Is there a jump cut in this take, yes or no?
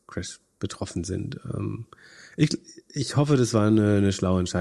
no